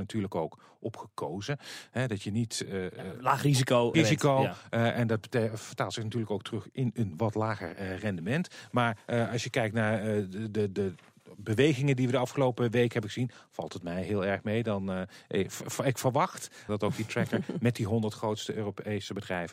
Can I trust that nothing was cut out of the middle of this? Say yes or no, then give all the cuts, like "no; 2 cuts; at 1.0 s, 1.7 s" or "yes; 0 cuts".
no; 2 cuts; at 3.9 s, 16.7 s